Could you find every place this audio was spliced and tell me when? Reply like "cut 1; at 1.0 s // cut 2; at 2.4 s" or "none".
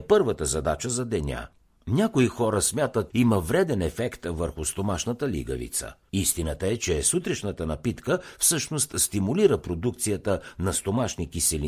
cut 1; at 3.1 s // cut 2; at 6.1 s